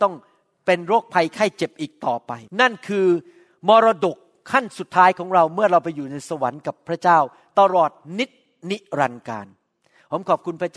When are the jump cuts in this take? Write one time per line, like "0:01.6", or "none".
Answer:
0:02.5